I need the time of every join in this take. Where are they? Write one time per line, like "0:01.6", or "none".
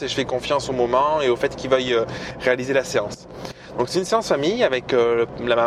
none

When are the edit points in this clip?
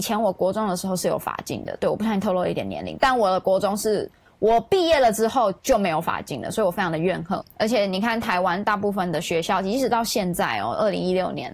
none

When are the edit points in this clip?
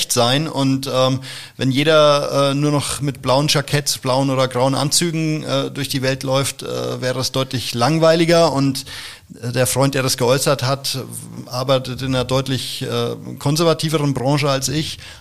none

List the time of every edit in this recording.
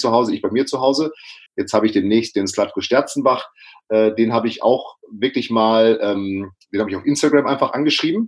0:01.5

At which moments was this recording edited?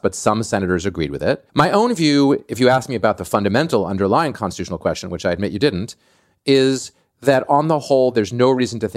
0:01.5

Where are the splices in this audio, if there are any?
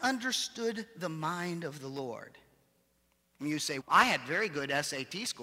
0:03.8

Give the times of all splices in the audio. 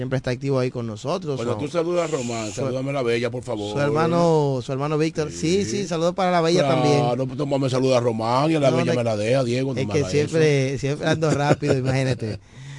none

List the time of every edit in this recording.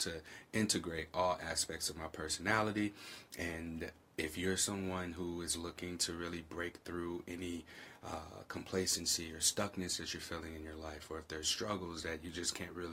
none

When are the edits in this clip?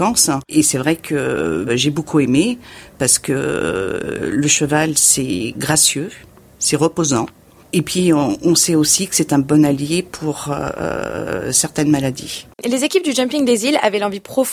0:12.5

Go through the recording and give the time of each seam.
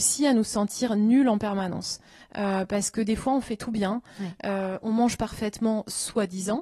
none

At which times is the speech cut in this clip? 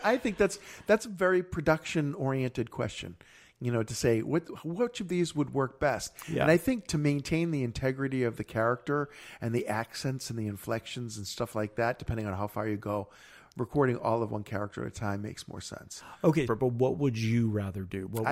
0:16.5

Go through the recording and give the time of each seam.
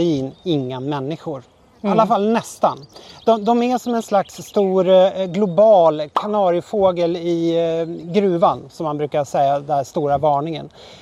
none

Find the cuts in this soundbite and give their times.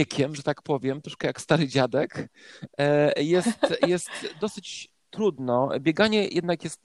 none

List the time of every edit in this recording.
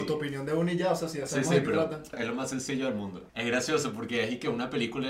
0:02.1
0:03.3

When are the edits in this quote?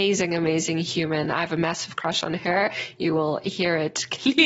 none

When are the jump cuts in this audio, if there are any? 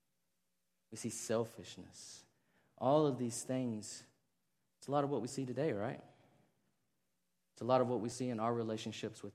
0:05.3
0:08.1

